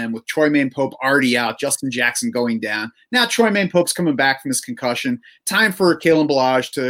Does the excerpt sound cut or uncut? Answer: uncut